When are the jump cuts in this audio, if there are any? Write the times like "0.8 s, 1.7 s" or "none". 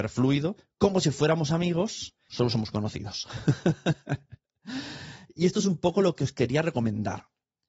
2.3 s